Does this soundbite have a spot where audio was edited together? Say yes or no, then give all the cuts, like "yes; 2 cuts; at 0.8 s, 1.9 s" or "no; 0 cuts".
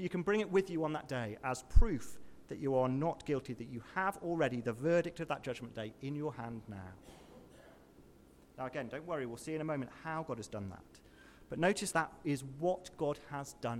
yes; 1 cut; at 11.9 s